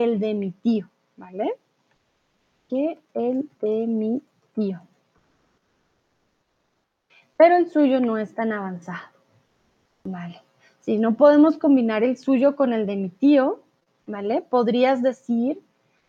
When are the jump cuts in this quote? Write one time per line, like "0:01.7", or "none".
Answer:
none